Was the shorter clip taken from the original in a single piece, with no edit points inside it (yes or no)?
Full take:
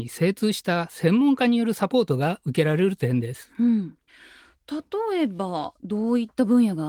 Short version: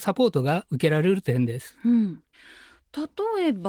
yes